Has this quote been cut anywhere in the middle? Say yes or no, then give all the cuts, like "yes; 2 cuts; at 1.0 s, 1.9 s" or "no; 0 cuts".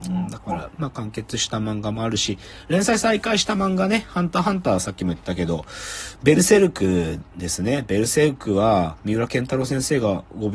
no; 0 cuts